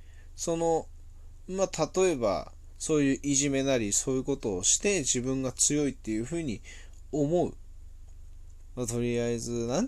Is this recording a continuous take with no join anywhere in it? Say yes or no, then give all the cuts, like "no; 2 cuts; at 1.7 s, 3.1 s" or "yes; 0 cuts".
no; 1 cut; at 8.7 s